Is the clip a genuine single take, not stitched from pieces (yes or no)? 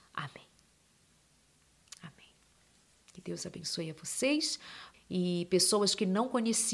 no